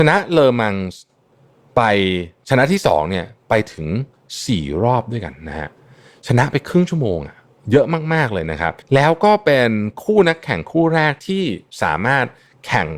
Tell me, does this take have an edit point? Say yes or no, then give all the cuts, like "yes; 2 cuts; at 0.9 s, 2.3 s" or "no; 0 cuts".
yes; 1 cut; at 8.8 s